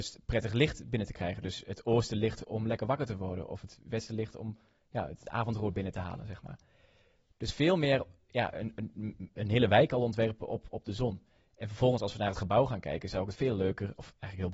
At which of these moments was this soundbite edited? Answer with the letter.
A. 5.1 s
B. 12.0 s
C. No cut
C